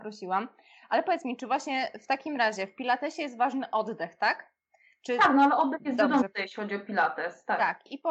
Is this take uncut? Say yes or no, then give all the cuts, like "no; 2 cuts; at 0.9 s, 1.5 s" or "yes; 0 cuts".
yes; 0 cuts